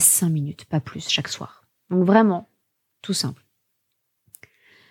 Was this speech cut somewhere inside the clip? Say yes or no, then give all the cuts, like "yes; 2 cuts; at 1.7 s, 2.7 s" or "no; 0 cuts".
no; 0 cuts